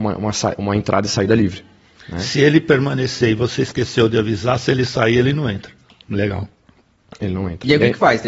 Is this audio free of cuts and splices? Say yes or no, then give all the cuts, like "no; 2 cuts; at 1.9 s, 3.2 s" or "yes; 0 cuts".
no; 1 cut; at 6.0 s